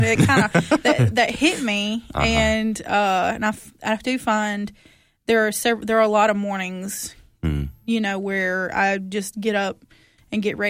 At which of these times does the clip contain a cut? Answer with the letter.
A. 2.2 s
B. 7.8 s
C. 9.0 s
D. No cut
D